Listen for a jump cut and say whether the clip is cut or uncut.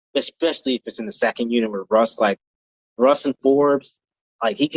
uncut